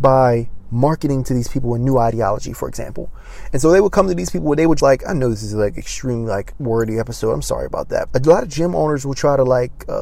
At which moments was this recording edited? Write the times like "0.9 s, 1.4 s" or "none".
4.8 s, 8.1 s